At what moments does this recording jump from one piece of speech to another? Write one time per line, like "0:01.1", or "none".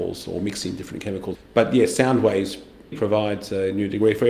0:01.3
0:02.9